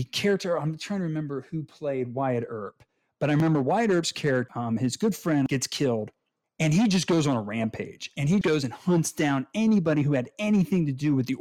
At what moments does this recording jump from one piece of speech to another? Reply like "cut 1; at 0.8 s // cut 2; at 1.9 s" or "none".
cut 1; at 8.4 s